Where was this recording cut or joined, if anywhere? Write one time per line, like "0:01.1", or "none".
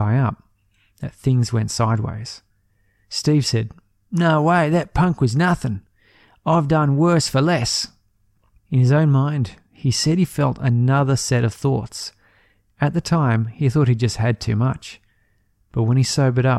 0:08.6